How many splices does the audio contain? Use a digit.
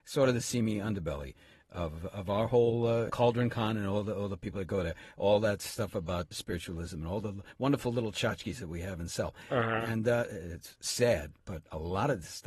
2